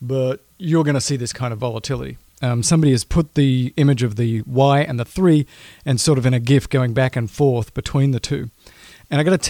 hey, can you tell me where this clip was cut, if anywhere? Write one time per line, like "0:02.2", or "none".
0:02.3